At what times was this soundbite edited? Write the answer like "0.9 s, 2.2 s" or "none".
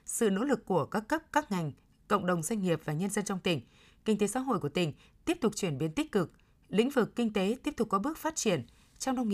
none